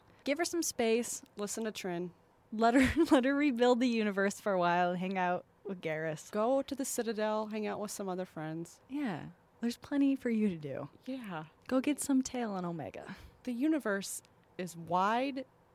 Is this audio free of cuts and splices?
yes; 0 cuts

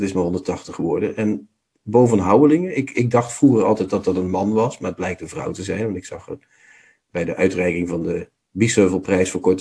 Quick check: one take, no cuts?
yes; 0 cuts

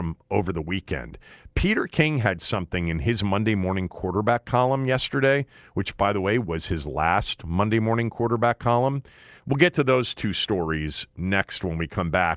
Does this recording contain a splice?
yes; 1 cut; at 9.4 s

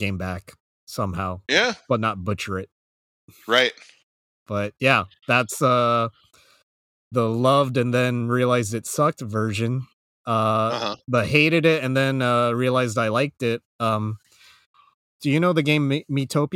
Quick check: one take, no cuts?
yes; 0 cuts

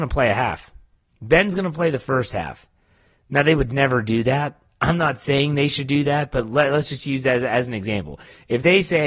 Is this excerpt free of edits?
yes; 0 cuts

